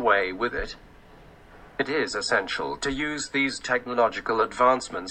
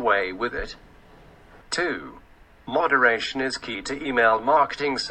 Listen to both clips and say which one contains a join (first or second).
second